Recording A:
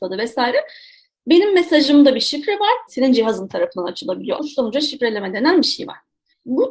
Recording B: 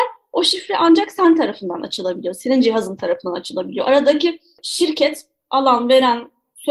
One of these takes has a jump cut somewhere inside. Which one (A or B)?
A